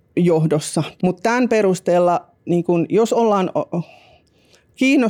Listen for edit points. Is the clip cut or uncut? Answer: cut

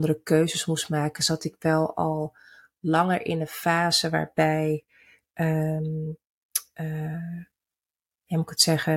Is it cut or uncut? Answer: uncut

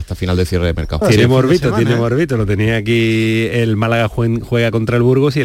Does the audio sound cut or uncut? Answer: cut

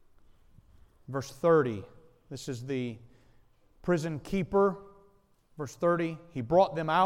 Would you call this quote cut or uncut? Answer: uncut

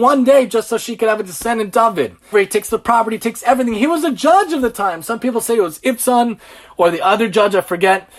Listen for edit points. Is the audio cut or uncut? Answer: cut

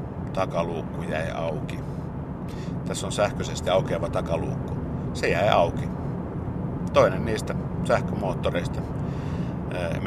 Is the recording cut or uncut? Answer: uncut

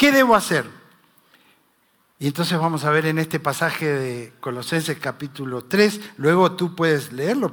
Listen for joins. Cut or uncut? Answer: uncut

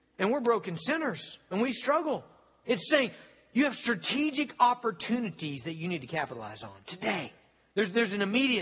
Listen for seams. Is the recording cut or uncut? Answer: cut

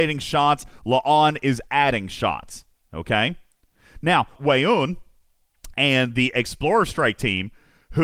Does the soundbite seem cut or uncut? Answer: cut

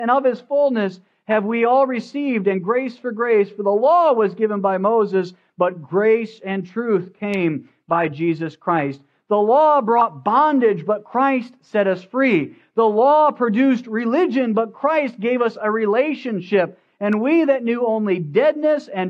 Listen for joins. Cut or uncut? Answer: uncut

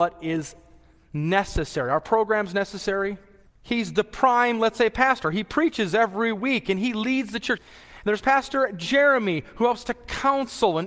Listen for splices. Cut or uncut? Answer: cut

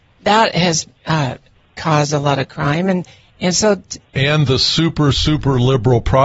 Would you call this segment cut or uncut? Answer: cut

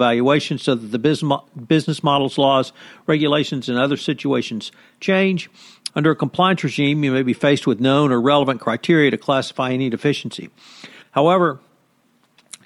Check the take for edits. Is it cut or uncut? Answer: cut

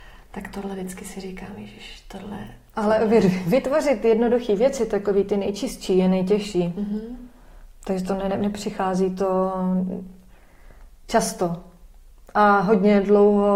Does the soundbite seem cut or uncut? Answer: uncut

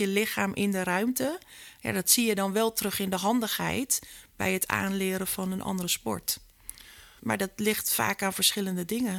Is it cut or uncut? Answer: cut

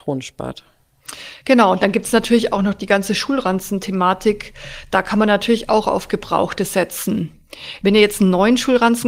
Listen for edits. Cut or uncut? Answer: uncut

